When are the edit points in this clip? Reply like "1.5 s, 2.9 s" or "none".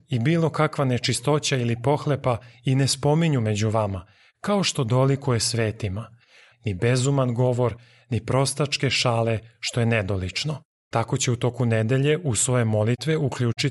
6.5 s, 10.7 s